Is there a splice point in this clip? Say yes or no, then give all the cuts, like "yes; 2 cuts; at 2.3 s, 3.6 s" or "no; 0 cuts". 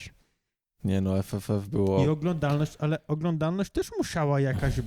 no; 0 cuts